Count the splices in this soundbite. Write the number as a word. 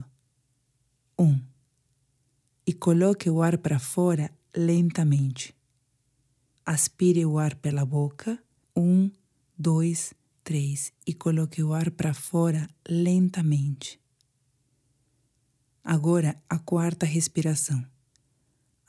two